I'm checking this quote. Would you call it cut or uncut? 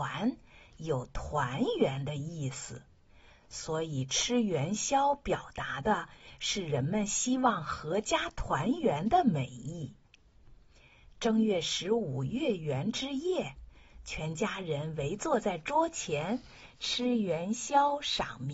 uncut